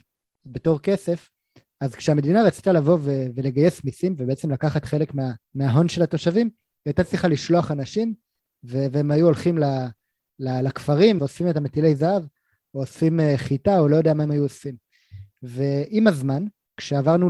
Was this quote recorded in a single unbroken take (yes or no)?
no